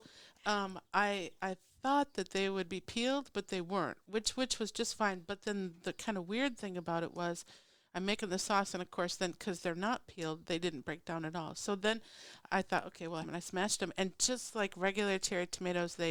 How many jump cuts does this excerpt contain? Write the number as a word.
one